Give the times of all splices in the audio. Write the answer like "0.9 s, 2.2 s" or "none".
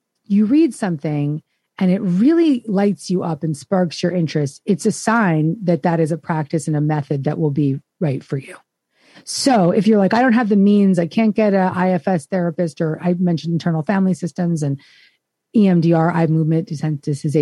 9.1 s